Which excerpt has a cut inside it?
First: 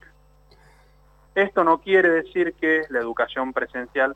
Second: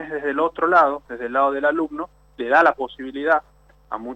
first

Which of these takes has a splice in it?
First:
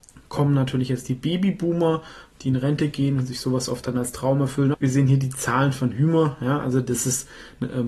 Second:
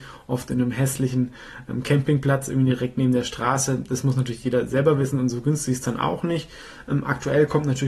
first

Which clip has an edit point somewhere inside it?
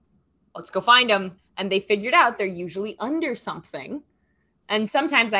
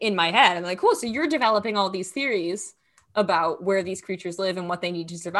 first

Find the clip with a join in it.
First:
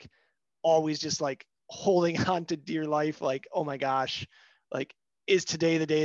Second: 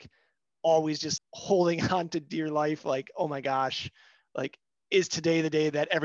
second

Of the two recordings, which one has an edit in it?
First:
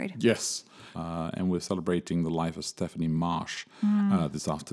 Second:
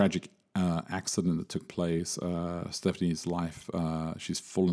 first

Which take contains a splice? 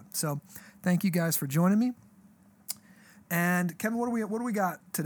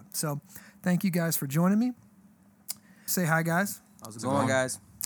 second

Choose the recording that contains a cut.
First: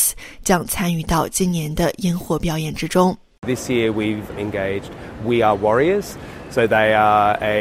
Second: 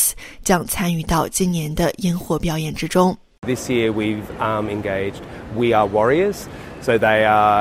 first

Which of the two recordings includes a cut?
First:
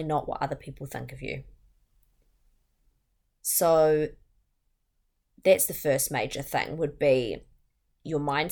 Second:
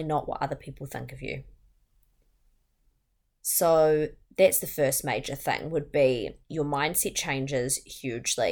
second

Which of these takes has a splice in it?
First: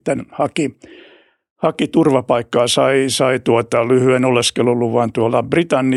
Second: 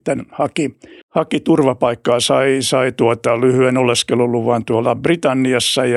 second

